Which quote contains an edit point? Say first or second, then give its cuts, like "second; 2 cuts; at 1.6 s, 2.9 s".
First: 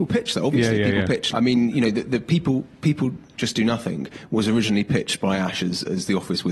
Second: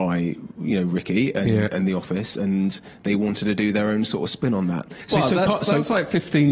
first; 1 cut; at 1.3 s